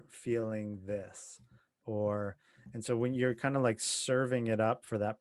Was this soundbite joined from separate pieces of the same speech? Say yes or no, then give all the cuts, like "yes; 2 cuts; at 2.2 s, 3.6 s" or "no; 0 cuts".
no; 0 cuts